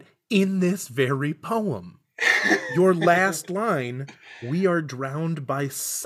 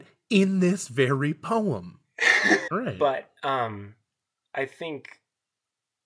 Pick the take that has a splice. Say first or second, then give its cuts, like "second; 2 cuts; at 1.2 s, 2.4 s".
second; 1 cut; at 2.7 s